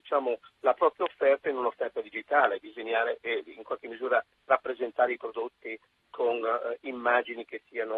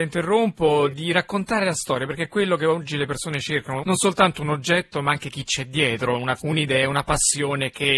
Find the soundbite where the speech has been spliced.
second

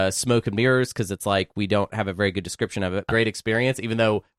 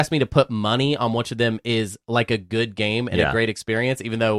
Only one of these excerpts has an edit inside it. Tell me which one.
first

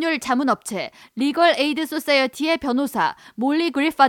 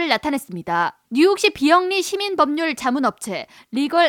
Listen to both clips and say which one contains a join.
second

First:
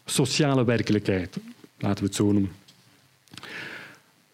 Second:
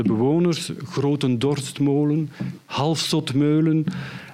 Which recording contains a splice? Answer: second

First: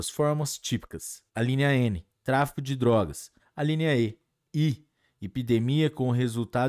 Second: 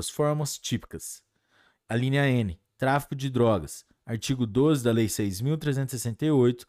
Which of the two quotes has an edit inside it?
first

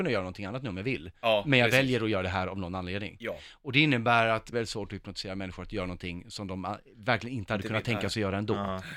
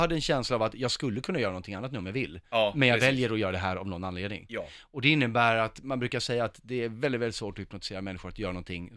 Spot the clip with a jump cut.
first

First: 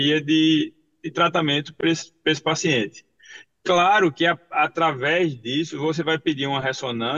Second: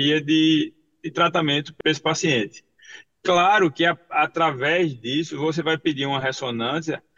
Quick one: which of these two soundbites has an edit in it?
second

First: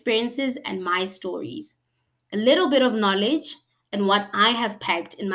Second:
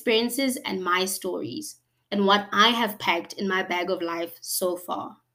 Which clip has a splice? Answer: second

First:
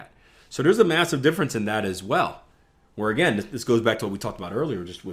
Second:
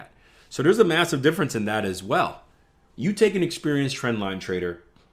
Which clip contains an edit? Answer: second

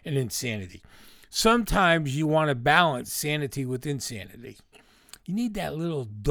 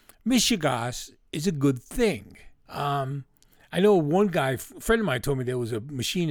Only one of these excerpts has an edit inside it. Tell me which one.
second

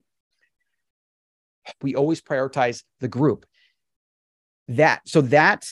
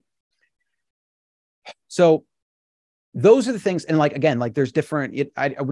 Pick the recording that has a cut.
first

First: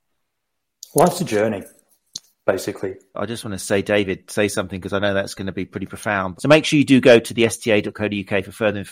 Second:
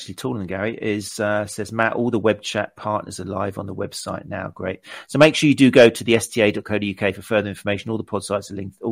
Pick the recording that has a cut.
first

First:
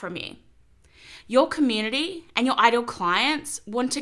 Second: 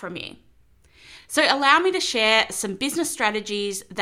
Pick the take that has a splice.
first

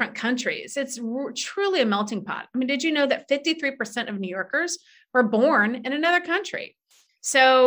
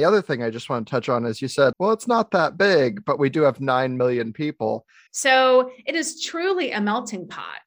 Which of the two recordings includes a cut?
second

